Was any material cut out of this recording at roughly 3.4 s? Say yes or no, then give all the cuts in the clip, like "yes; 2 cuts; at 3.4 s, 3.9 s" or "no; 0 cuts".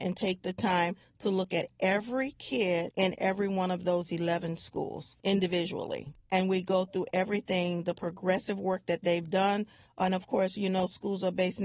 no; 2 cuts; at 6.2 s, 9.9 s